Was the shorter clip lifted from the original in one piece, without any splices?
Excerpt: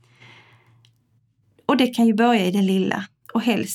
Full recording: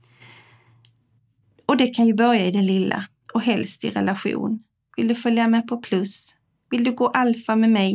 yes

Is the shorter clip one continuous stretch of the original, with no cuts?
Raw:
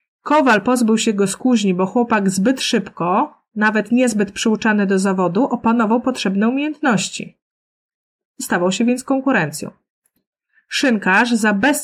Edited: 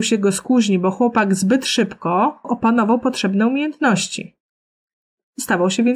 no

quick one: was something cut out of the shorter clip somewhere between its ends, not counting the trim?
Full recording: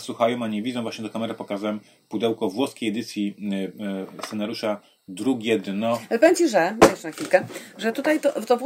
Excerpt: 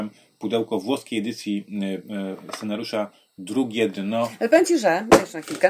no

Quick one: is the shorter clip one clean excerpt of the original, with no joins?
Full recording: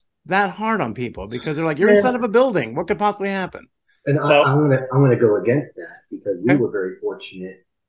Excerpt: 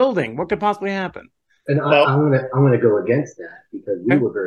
yes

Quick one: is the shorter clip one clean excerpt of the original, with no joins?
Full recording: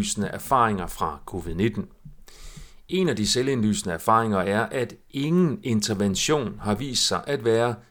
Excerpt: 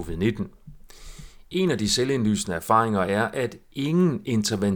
yes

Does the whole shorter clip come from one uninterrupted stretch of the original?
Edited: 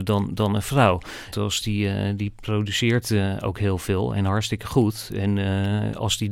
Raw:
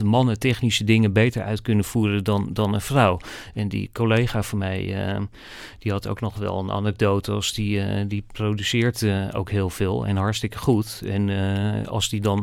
no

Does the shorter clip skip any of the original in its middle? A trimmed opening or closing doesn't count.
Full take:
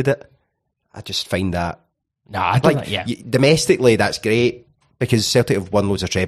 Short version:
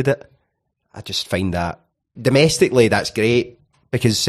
yes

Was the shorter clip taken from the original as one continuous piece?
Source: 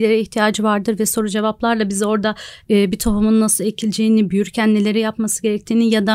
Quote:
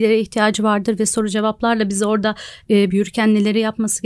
no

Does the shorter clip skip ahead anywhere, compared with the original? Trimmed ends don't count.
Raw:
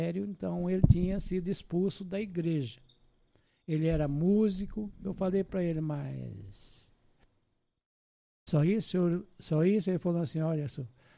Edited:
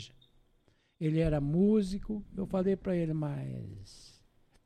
no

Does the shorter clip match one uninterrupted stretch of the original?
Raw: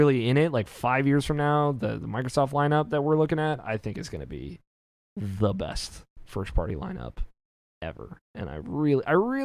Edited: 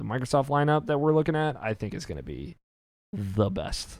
yes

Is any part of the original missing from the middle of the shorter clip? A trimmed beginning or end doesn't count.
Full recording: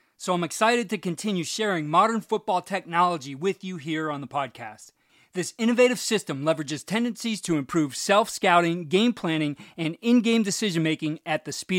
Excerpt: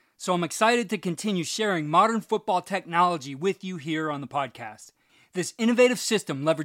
no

